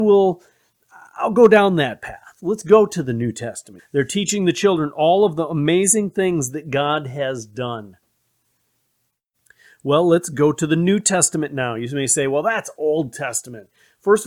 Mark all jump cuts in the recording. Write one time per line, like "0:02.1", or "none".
0:03.8